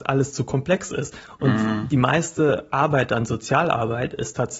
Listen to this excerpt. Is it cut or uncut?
uncut